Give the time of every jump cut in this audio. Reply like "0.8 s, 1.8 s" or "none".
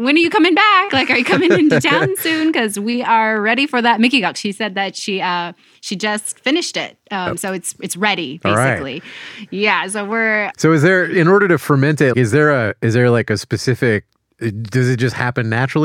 10.5 s, 12.1 s